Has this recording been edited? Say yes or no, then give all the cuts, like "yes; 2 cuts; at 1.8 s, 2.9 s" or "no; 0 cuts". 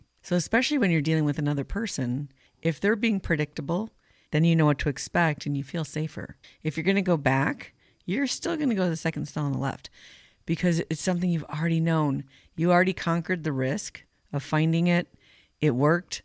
yes; 2 cuts; at 4.3 s, 6.4 s